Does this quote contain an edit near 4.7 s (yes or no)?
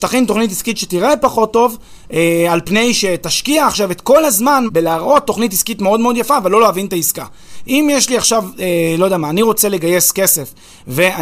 yes